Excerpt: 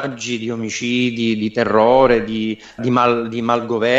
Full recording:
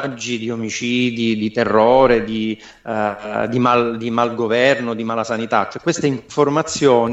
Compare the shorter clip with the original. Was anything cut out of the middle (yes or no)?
yes